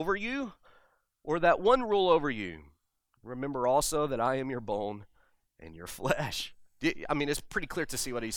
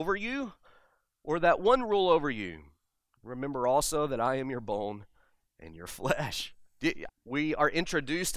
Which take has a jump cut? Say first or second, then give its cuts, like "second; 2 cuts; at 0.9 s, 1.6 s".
second; 1 cut; at 7.1 s